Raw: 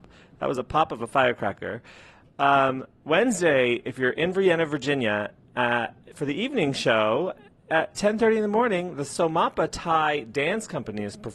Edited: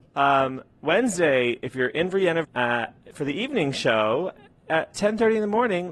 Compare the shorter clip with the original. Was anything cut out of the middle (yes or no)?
yes